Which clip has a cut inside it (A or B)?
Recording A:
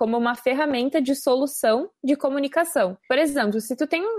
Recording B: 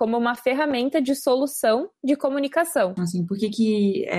B